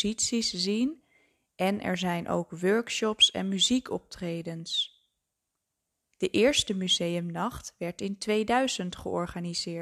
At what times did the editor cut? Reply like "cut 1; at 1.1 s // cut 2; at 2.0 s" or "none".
none